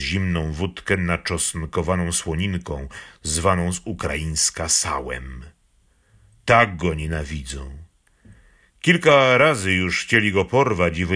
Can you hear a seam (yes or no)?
no